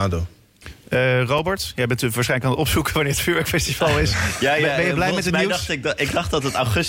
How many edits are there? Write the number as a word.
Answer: zero